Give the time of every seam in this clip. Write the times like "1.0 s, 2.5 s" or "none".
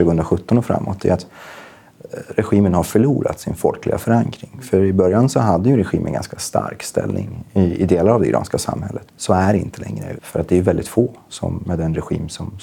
9.1 s, 10.2 s, 11.6 s